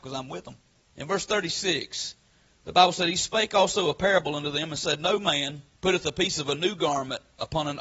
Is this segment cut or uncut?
cut